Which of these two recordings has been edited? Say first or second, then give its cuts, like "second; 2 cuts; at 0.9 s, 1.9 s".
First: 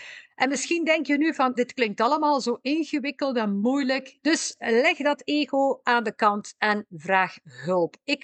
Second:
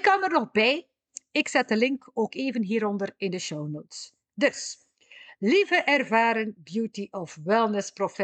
first; 2 cuts; at 1.6 s, 4.2 s